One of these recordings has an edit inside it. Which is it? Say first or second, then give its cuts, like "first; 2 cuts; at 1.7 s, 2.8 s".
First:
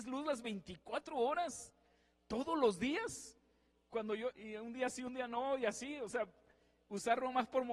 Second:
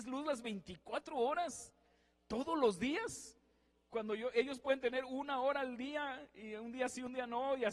first; 1 cut; at 4.3 s